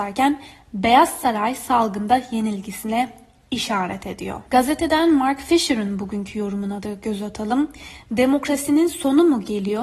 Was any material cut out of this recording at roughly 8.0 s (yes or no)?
no